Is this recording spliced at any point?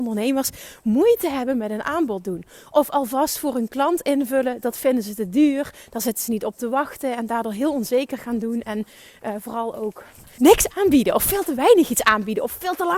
yes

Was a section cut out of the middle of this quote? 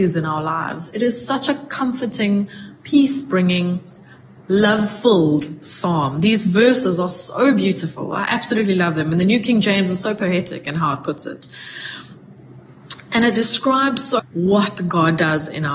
yes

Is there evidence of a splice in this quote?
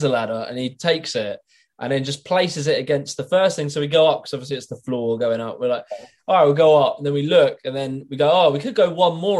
no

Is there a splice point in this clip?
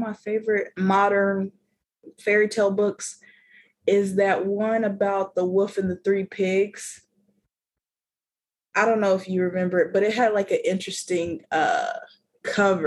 no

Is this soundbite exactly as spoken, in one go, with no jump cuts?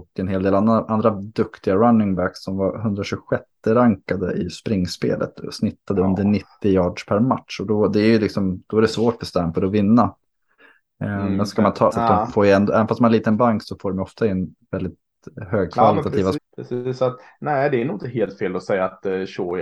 no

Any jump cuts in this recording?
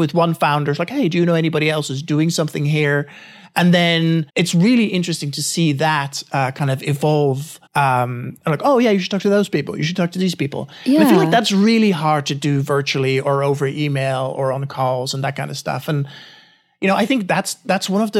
yes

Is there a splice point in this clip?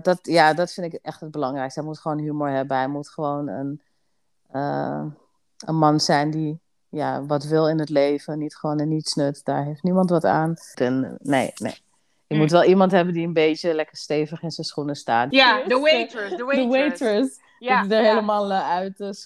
yes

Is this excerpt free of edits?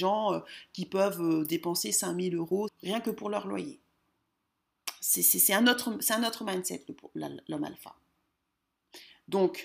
no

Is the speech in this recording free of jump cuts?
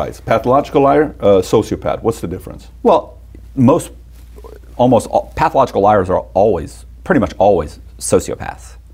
yes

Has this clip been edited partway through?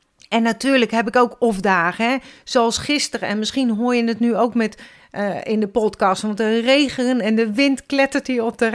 no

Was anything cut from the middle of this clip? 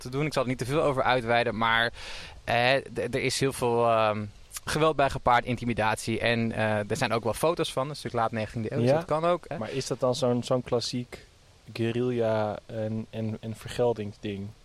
yes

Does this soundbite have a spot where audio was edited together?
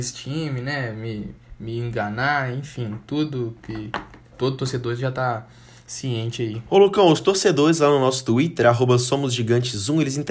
no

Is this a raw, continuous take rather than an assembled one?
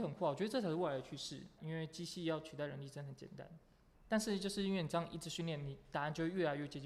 no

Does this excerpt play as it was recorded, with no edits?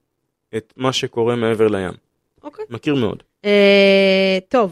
yes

